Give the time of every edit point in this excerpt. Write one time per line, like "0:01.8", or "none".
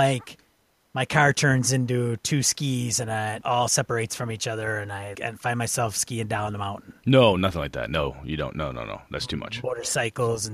0:03.4
0:05.2